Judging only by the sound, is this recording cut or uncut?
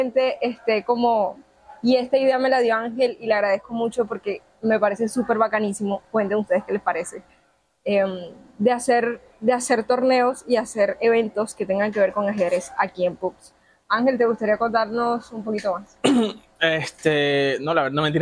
uncut